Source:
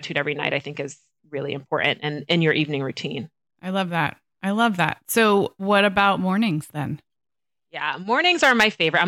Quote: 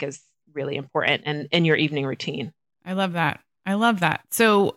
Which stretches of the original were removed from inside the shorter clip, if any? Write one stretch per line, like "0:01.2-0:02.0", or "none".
none